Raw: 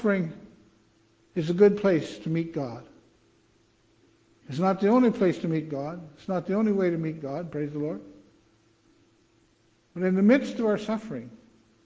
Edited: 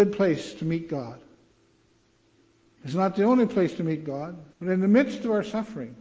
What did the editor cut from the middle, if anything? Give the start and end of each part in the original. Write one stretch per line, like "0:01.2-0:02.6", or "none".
0:06.2-0:09.9